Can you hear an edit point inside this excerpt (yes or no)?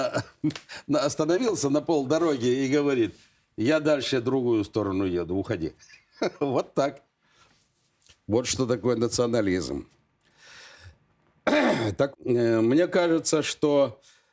yes